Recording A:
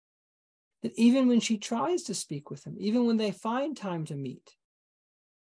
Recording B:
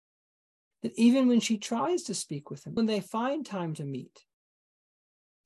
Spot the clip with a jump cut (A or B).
B